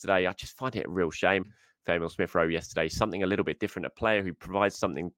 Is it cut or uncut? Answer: cut